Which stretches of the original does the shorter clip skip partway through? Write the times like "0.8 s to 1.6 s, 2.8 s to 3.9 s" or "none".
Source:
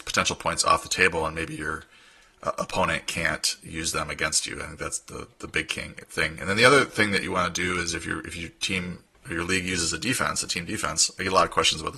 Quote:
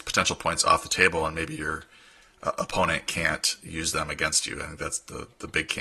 none